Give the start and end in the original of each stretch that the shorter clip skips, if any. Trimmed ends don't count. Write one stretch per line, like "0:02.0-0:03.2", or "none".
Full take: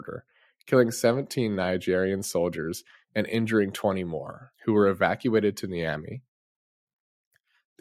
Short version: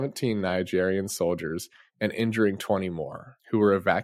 none